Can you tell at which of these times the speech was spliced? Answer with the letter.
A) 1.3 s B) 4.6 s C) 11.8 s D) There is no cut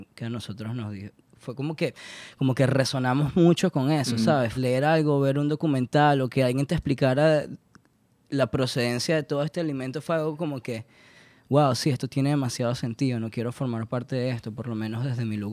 B